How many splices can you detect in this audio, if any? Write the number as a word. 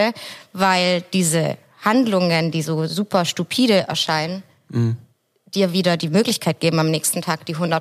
zero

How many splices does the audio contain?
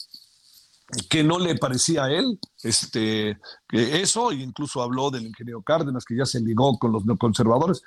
zero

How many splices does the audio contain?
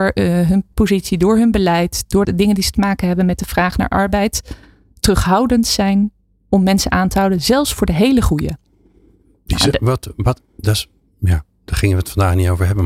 one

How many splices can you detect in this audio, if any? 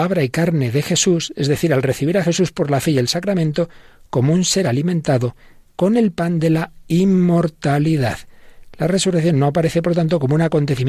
zero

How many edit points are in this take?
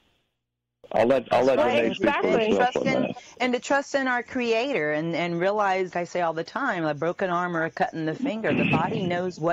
one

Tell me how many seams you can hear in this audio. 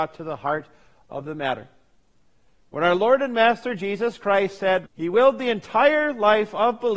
one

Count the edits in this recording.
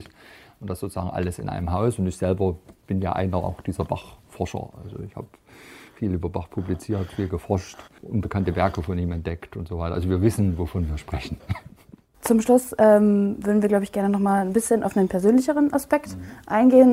zero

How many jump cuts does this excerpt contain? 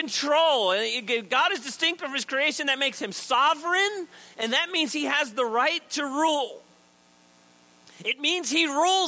zero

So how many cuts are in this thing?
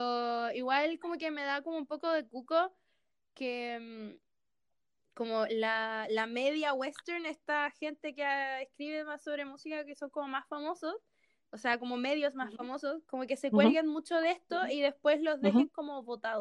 zero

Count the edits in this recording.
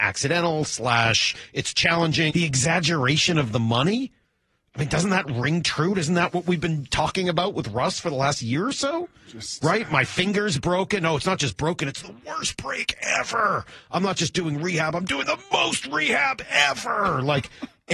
one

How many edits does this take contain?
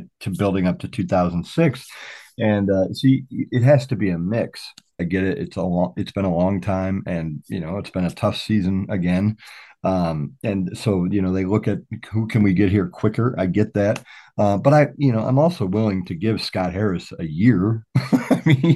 one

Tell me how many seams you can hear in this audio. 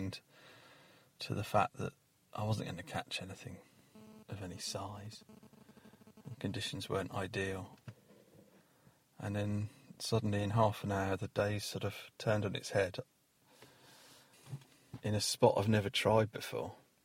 zero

